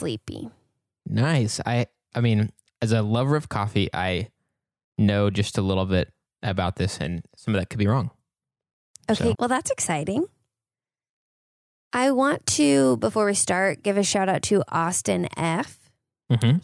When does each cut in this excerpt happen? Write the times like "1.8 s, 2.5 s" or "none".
9.3 s